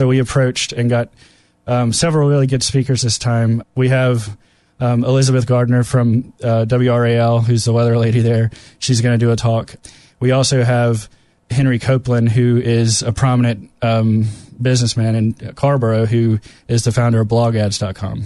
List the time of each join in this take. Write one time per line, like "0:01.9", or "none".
none